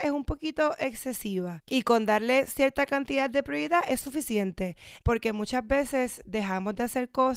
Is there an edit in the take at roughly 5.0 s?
yes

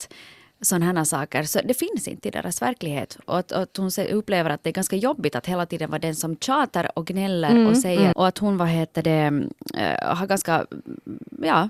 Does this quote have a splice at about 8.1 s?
yes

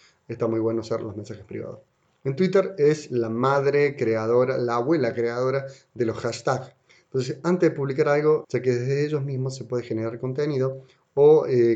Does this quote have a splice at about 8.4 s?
yes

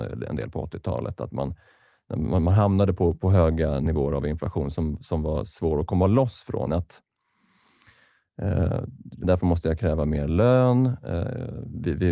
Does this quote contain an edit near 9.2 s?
yes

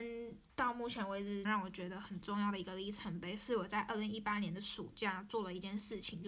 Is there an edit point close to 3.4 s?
no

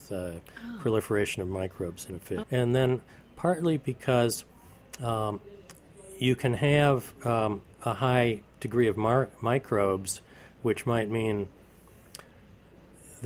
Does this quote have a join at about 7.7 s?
no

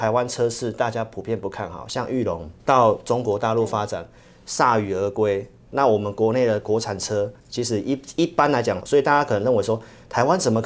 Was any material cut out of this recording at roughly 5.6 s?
no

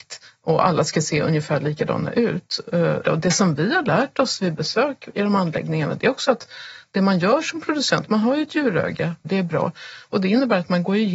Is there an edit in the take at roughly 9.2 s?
yes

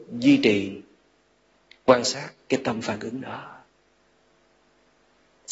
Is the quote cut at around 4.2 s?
no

